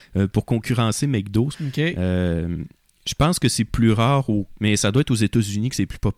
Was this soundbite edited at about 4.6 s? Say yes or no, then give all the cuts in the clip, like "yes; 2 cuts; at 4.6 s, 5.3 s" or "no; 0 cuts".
yes; 2 cuts; at 1.5 s, 4.6 s